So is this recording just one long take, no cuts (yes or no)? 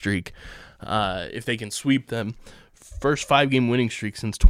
yes